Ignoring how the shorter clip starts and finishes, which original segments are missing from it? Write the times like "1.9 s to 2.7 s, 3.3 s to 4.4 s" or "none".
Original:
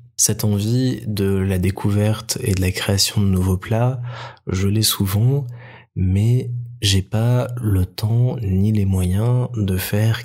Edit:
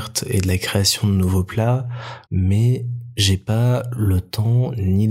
4.4 s to 5.9 s

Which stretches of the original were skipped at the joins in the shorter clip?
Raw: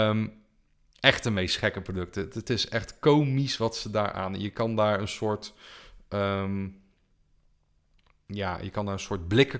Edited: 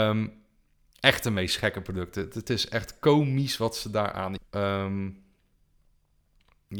4.4 s to 6.0 s

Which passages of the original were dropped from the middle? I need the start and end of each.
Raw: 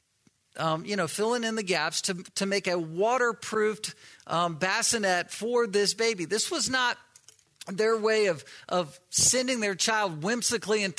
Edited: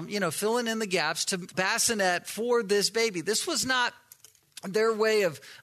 2.3 s to 4.6 s

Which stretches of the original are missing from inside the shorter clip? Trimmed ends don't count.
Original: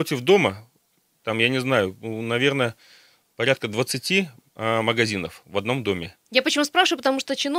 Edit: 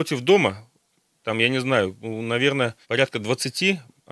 2.8 s to 3.3 s

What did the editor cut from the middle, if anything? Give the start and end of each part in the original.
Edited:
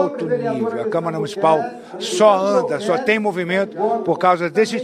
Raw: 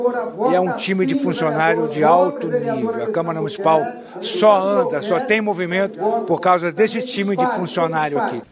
none

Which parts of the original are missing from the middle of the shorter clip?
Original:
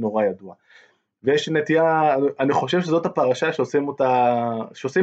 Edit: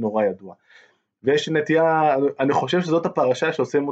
none

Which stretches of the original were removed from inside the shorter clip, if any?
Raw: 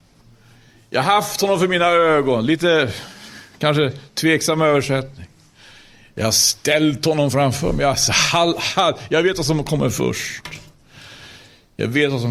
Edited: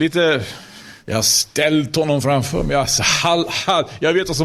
3.5 s to 6.1 s

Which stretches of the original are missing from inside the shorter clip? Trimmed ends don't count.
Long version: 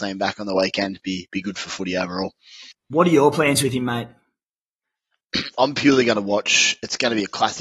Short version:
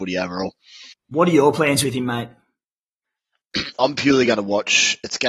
none

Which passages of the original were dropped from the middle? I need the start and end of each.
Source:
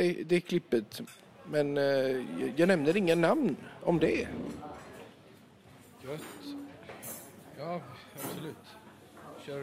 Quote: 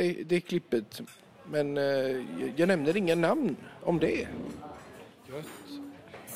5.2 s to 5.9 s

